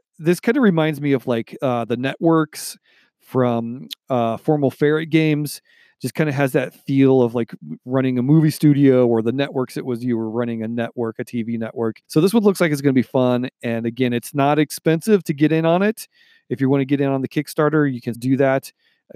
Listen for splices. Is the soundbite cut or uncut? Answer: cut